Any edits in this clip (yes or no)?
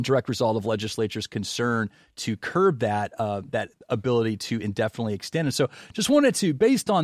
no